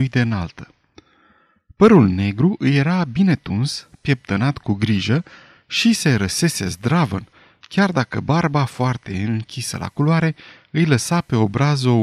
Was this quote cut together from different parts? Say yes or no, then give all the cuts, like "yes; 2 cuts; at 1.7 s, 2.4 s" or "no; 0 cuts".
no; 0 cuts